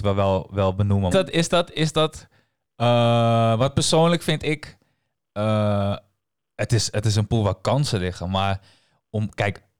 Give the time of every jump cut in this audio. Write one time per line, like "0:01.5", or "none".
0:01.1